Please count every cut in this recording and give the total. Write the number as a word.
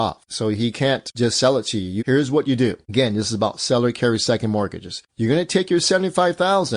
one